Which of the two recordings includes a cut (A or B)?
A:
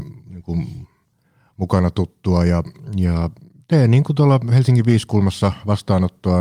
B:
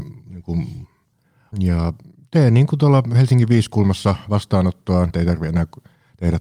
B